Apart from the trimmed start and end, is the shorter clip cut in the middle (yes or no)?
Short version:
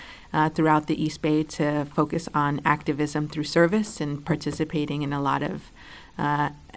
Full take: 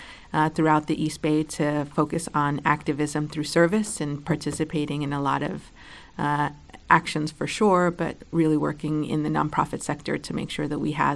no